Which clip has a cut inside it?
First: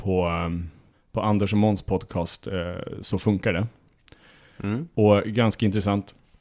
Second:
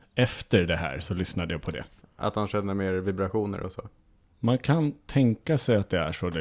second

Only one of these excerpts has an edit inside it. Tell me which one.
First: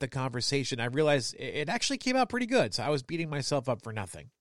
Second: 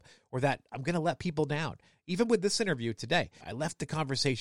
second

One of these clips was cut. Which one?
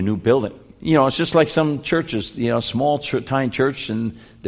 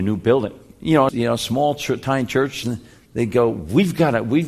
second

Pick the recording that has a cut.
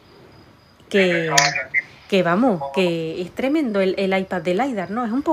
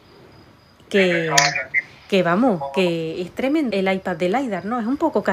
second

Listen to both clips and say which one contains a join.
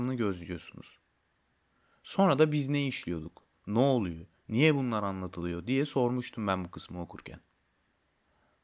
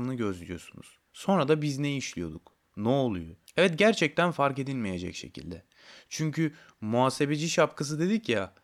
second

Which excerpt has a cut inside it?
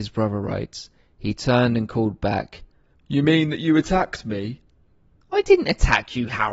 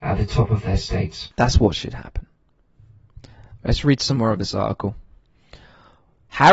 first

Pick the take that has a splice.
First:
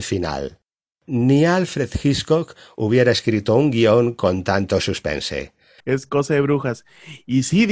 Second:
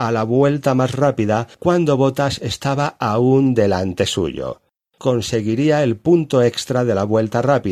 first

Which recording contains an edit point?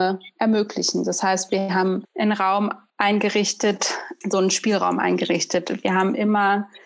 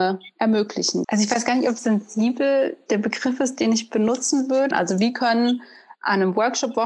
second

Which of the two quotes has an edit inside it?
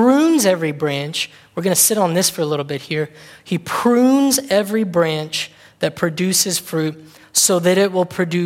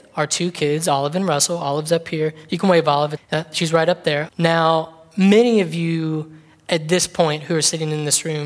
second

